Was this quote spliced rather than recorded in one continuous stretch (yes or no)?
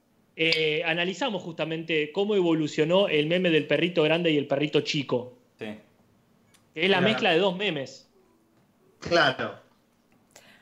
yes